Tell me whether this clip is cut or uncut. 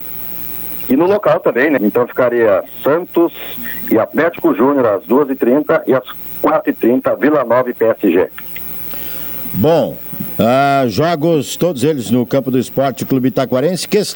cut